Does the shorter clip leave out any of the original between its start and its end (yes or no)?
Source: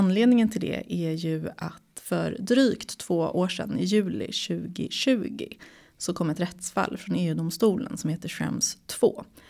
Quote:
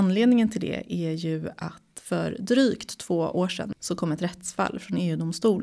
yes